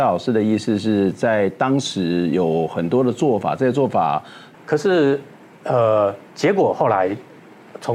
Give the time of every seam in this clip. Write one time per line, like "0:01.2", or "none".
0:04.5
0:06.3